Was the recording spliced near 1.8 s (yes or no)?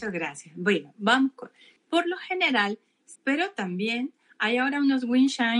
yes